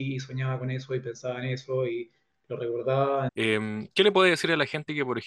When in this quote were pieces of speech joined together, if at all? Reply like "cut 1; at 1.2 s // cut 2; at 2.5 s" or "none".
cut 1; at 3.3 s

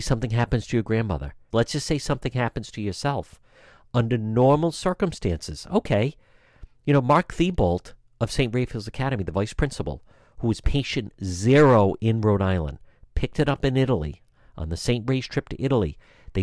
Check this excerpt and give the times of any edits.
cut 1; at 1.5 s

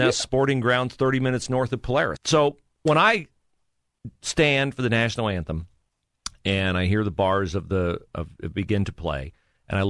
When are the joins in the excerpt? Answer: cut 1; at 2.2 s

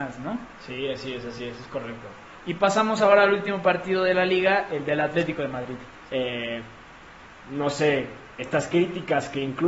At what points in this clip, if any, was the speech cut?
cut 1; at 6.1 s // cut 2; at 8.4 s

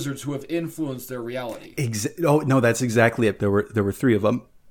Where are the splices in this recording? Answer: cut 1; at 3.4 s

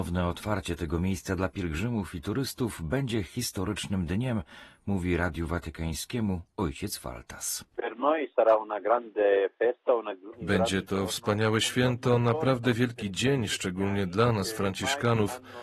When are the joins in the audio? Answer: none

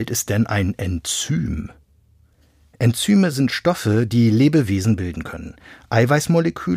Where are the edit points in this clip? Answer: none

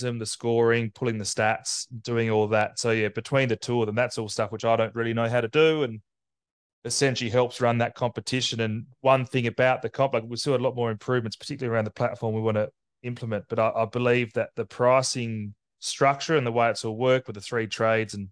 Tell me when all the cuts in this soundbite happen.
none

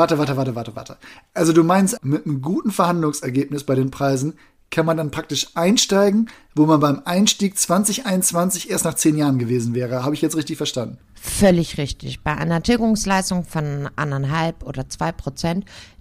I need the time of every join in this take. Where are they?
cut 1; at 2.0 s

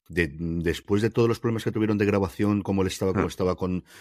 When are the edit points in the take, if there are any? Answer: none

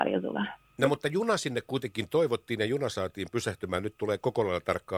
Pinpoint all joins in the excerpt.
none

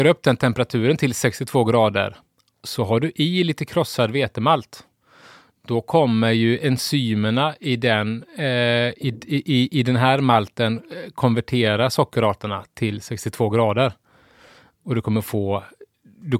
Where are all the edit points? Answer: none

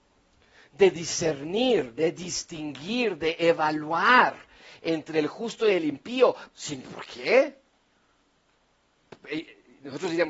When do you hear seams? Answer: cut 1; at 6.5 s

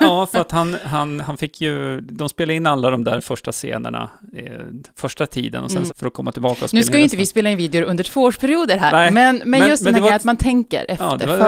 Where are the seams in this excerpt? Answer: cut 1; at 1.2 s // cut 2; at 5.9 s

